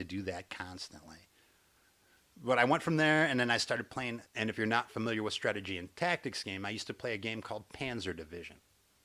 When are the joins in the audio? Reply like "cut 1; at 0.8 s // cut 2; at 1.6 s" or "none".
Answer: cut 1; at 4.2 s